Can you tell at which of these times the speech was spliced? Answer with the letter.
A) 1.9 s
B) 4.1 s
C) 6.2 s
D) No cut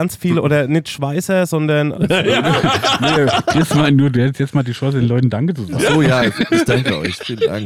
A